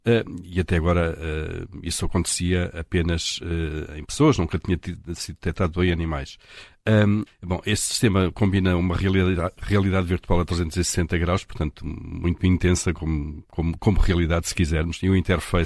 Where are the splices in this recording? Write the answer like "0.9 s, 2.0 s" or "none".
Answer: 7.3 s